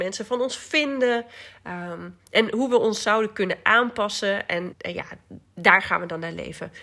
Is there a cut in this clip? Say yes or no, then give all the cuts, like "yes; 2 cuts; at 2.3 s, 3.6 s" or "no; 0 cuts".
yes; 1 cut; at 4.7 s